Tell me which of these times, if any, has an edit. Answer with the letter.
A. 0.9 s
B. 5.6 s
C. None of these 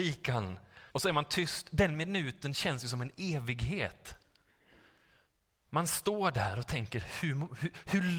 A